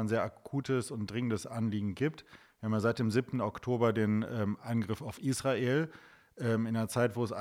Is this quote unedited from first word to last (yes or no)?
yes